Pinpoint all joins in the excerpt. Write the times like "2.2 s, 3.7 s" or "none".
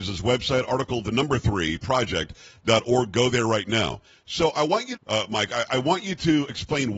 5.0 s